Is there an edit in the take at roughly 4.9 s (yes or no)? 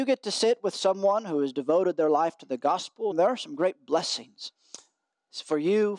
no